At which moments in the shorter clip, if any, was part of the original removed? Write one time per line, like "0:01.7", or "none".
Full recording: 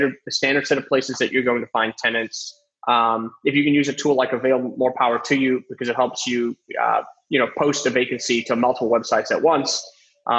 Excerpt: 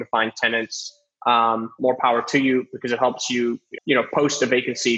0:01.8
0:03.8